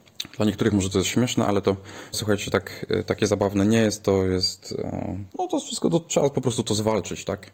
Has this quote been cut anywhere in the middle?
yes; 2 cuts; at 2.1 s, 5.3 s

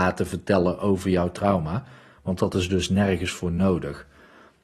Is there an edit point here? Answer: no; 0 cuts

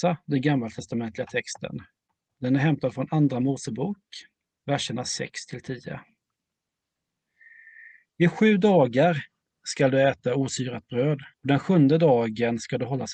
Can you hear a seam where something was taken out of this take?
yes; 2 cuts; at 4.6 s, 11.3 s

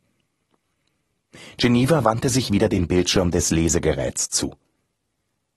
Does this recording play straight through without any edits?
yes; 0 cuts

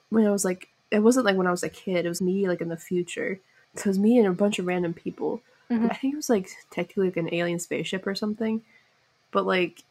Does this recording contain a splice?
yes; 2 cuts; at 2.2 s, 5.9 s

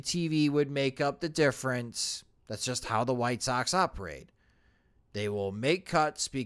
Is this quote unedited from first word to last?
no; 1 cut; at 5.0 s

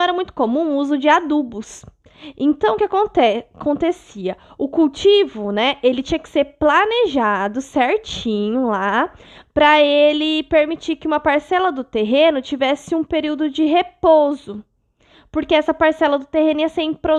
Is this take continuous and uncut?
yes; 0 cuts

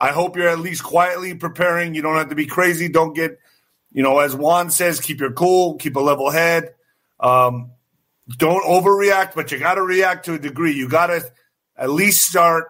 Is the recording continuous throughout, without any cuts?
yes; 0 cuts

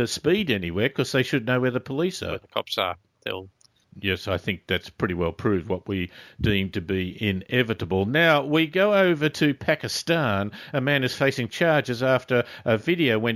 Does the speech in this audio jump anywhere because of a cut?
no; 0 cuts

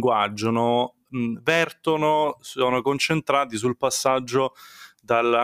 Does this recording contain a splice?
no; 0 cuts

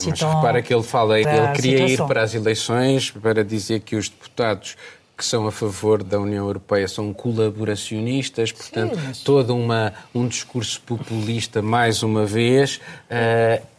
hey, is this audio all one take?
no; 2 cuts; at 1.2 s, 6.0 s

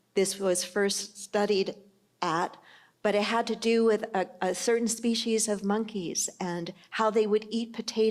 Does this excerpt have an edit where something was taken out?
no; 0 cuts

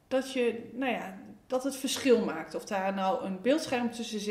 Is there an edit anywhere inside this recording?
no; 0 cuts

